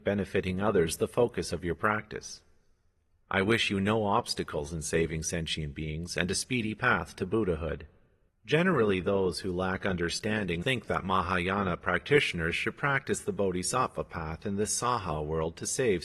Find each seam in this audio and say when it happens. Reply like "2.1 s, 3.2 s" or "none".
8.3 s, 10.6 s